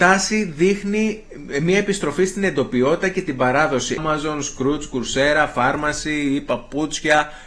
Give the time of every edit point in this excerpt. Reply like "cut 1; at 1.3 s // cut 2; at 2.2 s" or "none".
cut 1; at 4.0 s // cut 2; at 5.5 s

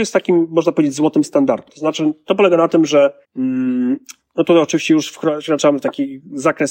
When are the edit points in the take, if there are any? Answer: cut 1; at 1.7 s // cut 2; at 3.2 s

